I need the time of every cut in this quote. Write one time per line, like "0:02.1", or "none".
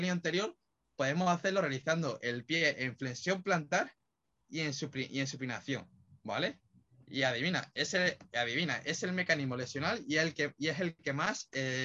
none